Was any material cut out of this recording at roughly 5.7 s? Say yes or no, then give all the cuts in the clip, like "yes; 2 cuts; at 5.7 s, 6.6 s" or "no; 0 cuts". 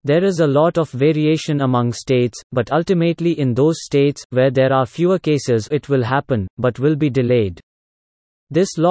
yes; 1 cut; at 5.7 s